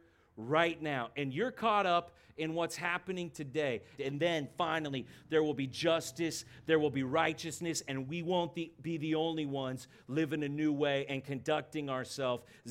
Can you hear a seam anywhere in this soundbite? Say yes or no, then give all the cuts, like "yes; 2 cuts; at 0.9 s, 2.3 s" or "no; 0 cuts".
yes; 1 cut; at 4.0 s